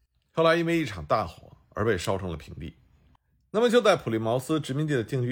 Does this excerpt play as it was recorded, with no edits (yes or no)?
yes